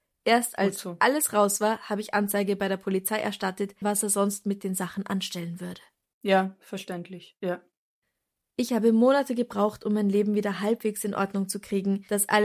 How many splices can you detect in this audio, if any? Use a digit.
1